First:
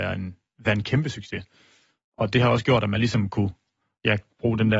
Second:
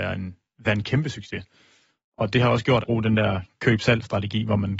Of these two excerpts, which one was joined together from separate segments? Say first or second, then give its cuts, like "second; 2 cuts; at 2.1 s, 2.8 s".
second; 1 cut; at 2.8 s